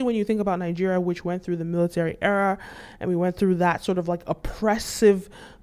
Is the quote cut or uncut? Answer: uncut